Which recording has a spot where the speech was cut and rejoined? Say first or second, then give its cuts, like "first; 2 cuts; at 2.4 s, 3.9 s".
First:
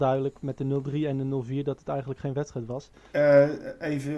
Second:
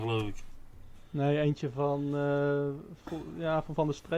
first; 1 cut; at 3.1 s